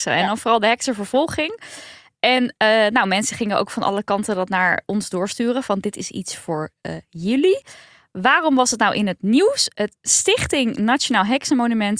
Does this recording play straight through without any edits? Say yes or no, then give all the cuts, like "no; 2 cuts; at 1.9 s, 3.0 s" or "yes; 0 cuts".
yes; 0 cuts